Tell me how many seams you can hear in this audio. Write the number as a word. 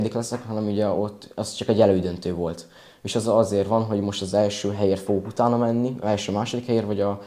zero